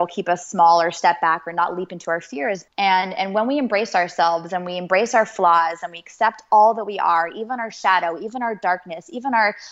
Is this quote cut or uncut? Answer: cut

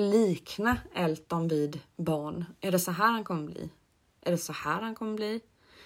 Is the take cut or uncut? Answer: uncut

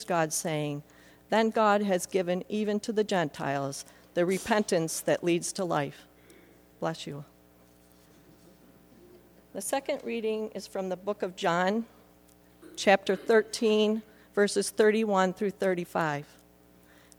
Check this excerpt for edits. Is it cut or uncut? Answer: uncut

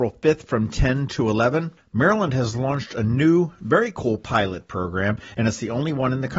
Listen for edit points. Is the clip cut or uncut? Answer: cut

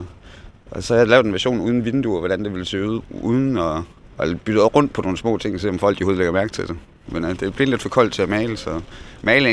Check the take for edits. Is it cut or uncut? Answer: cut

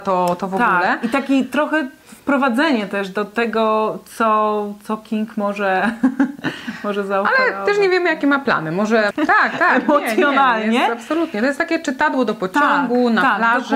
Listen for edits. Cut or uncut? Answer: cut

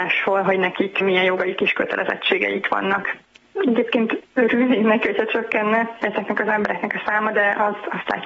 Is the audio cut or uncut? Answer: cut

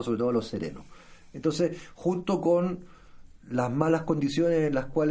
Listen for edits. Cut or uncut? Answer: uncut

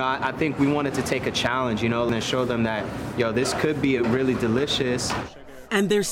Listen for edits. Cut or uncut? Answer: uncut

